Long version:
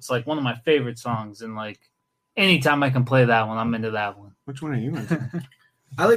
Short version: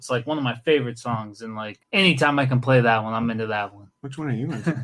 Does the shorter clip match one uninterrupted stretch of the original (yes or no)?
no